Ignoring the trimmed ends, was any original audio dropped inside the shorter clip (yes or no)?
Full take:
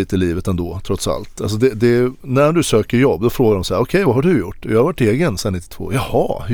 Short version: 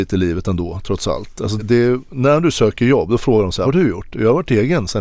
yes